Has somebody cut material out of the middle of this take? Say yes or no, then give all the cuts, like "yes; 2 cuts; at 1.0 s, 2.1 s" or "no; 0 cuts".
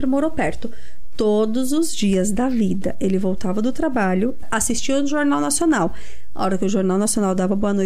yes; 1 cut; at 4.4 s